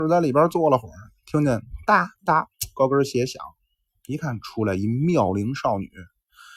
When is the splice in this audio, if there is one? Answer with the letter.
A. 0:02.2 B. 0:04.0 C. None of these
A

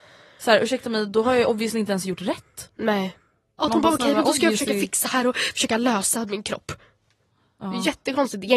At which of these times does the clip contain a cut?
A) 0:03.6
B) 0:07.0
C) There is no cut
A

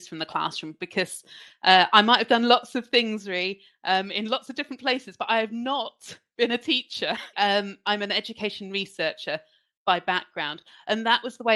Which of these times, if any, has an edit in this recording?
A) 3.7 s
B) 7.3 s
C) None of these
B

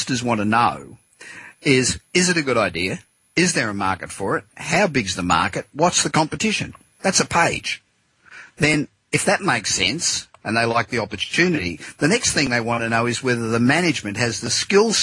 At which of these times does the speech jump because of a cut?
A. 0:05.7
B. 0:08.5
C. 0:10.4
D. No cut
C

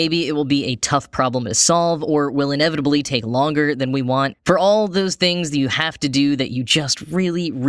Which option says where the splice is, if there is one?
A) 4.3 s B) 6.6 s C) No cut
A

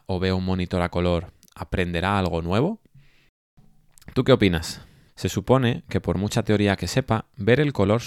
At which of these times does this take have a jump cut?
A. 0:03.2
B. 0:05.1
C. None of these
B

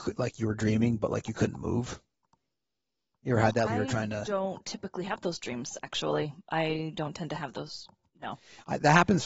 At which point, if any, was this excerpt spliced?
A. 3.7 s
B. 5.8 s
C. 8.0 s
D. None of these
A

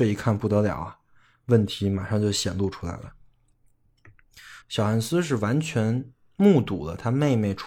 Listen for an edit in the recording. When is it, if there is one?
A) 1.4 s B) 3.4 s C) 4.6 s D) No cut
C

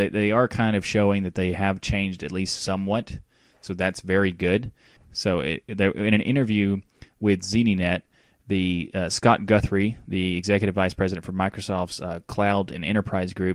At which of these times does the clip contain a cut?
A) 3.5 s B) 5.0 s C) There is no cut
B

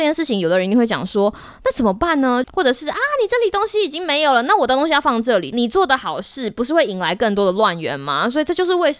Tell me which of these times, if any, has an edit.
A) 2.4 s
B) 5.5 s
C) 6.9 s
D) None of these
A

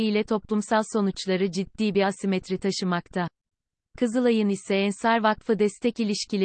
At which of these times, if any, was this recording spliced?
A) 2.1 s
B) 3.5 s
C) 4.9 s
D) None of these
D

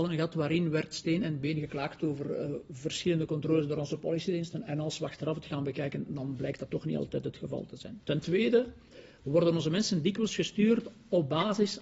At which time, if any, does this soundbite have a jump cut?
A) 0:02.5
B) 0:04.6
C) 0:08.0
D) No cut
D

